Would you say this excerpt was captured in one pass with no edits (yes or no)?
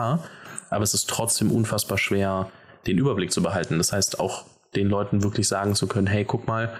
yes